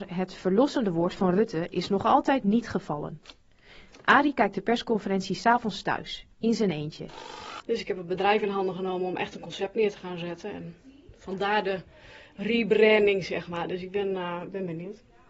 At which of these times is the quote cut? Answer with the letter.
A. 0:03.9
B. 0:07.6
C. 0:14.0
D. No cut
B